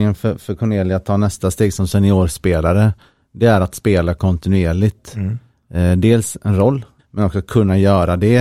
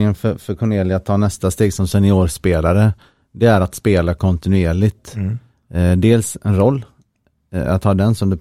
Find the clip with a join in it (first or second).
first